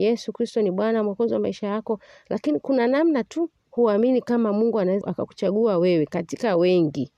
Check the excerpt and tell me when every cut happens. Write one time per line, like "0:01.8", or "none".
0:05.0